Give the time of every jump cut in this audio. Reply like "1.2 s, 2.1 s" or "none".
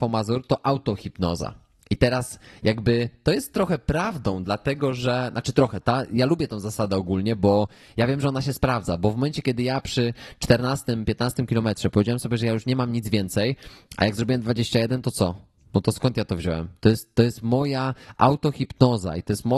none